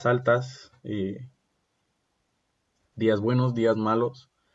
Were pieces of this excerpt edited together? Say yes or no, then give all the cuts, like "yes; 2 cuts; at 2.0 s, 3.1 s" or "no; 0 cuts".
no; 0 cuts